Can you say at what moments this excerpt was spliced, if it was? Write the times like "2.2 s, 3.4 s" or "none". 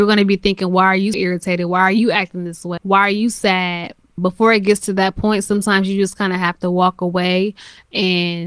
1.1 s, 2.8 s